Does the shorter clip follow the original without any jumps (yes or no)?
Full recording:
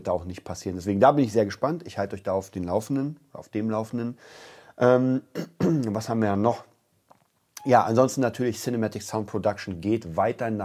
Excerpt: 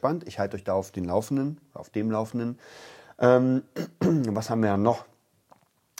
yes